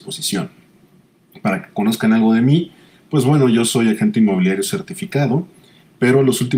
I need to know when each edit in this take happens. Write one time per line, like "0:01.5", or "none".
none

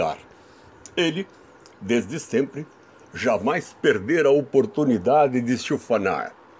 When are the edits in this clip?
none

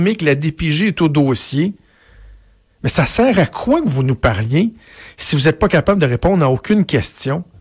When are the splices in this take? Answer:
none

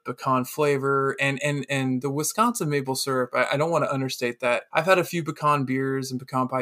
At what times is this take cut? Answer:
0:04.7

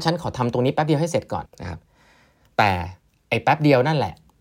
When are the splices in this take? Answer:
0:01.5

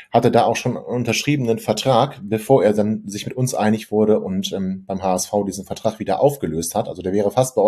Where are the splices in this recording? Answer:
none

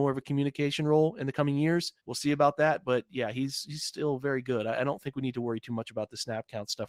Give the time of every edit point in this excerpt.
0:02.0

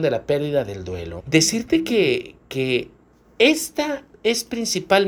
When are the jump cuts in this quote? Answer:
0:01.2

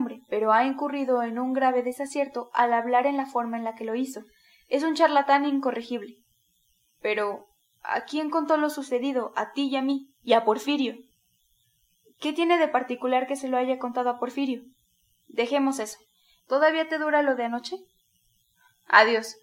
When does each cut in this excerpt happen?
0:10.2
0:16.4

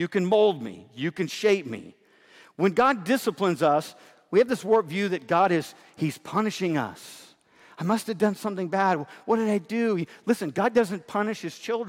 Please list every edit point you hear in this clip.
none

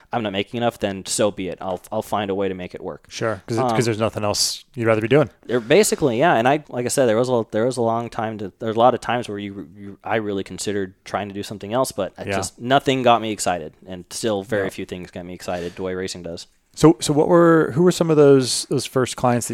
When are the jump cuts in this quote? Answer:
0:06.6

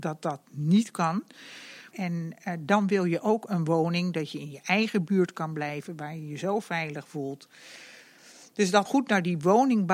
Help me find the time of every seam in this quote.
0:01.9
0:08.9

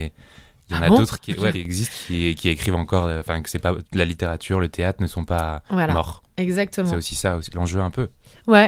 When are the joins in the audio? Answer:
0:01.5

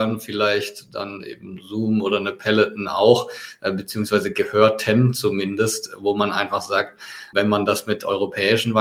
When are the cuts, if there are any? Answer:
0:07.3

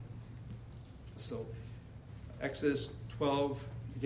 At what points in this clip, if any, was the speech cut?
0:01.2
0:02.3

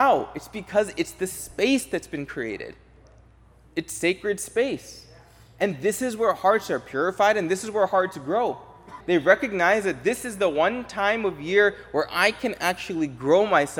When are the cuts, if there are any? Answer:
0:09.0

